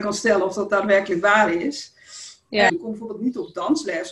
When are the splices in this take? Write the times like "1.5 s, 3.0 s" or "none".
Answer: 2.7 s